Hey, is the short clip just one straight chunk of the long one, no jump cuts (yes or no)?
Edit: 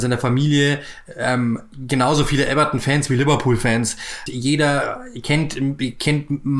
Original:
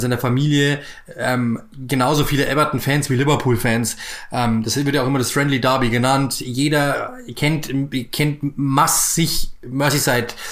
no